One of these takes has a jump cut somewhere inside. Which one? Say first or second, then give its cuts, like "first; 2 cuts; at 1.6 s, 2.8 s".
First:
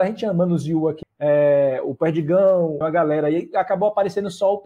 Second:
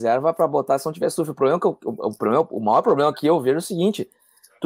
first; 2 cuts; at 1.0 s, 2.8 s